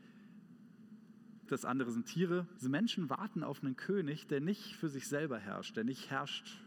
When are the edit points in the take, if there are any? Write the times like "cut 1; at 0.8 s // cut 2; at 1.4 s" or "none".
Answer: cut 1; at 1.5 s // cut 2; at 2.6 s